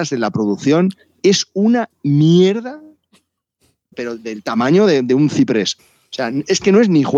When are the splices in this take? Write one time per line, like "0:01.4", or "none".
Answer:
0:03.9
0:05.8